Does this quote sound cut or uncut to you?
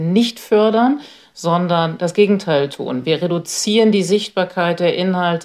uncut